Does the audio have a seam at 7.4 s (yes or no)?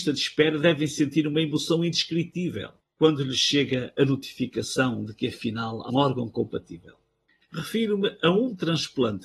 yes